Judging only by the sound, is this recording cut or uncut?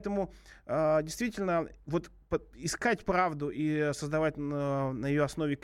uncut